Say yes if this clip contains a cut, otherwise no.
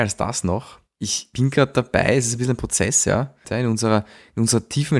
yes